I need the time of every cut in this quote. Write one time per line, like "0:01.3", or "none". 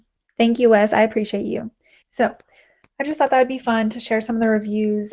none